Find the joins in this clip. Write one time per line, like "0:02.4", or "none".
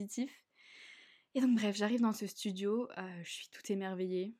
none